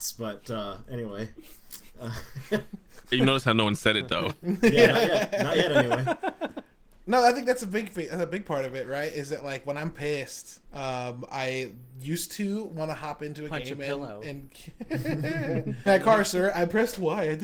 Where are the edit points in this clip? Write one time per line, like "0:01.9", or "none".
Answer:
0:10.6
0:15.9